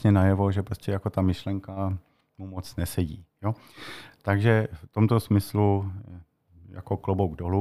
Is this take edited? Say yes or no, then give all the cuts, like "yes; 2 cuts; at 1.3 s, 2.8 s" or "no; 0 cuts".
no; 0 cuts